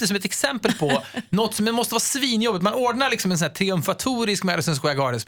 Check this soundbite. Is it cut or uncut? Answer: uncut